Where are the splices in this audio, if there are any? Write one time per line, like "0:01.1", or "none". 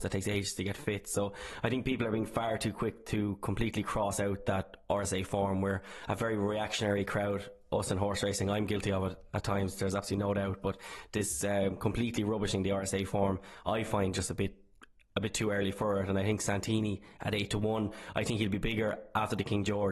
none